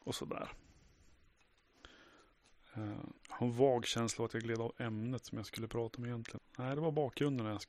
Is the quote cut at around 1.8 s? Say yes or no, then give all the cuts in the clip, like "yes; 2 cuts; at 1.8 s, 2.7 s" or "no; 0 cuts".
no; 2 cuts; at 3.2 s, 6.4 s